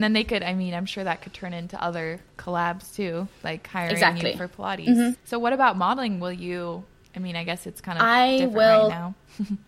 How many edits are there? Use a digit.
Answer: 1